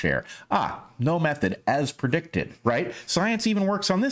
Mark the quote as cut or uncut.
uncut